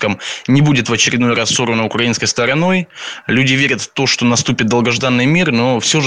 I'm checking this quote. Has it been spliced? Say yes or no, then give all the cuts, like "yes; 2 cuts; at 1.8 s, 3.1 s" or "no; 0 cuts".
no; 0 cuts